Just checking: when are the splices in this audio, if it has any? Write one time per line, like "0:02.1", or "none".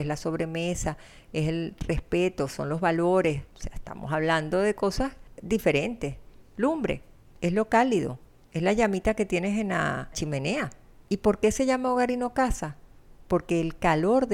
0:06.4

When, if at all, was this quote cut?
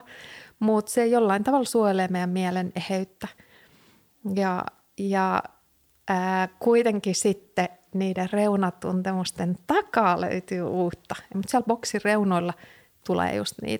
0:11.3

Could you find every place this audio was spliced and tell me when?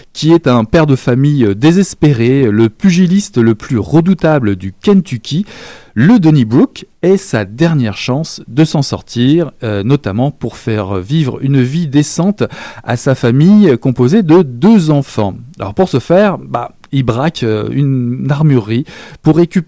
none

